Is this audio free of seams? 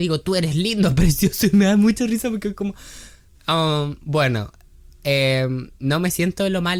yes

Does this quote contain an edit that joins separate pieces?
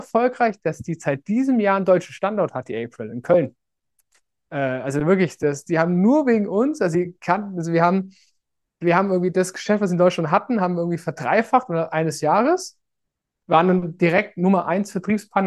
no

